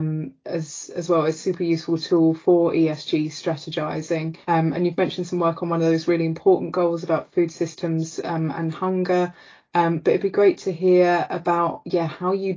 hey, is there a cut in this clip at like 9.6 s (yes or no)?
no